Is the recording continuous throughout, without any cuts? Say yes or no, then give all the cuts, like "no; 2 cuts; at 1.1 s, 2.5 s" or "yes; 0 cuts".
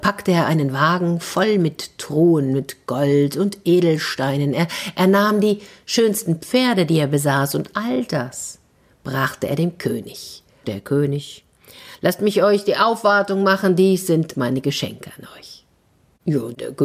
no; 1 cut; at 10.6 s